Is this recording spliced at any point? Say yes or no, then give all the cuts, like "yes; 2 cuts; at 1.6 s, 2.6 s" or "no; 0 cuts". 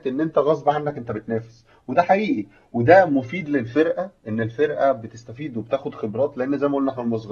no; 0 cuts